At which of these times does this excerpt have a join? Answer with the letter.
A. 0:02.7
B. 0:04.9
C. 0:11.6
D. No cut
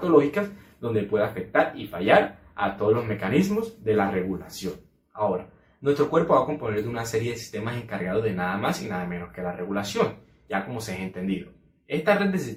D